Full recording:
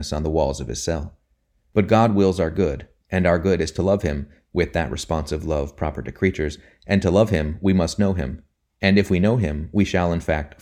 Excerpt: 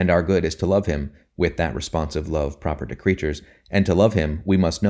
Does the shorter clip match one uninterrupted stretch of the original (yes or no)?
yes